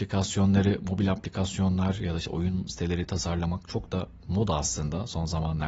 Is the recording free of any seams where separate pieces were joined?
yes; 0 cuts

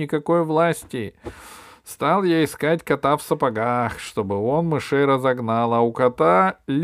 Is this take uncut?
yes; 0 cuts

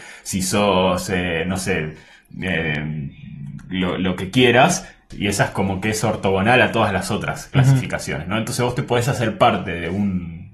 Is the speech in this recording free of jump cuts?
no; 1 cut; at 5.1 s

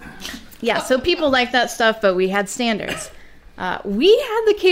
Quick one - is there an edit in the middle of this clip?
no; 0 cuts

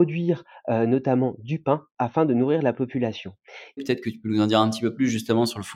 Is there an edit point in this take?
yes; 1 cut; at 3.8 s

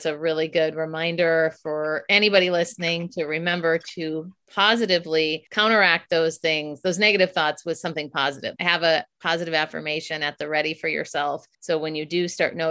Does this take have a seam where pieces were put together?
yes; 3 cuts; at 5.5 s, 8.6 s, 11.5 s

